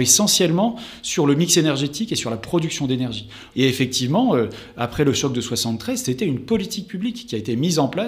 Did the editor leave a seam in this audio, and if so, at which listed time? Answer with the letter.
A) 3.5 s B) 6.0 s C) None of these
A